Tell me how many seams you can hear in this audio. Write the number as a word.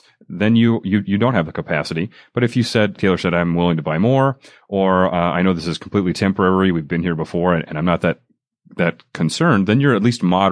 one